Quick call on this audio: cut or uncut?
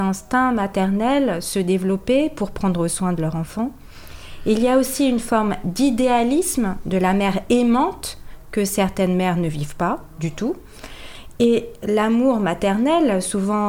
uncut